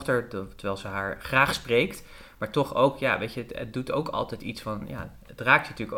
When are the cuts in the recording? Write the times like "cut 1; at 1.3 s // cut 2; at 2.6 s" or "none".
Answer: none